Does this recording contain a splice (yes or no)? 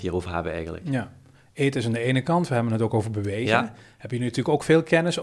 no